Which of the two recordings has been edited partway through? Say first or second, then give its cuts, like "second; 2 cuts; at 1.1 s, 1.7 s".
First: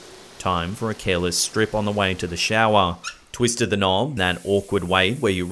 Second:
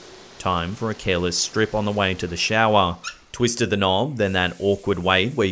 first; 1 cut; at 4.2 s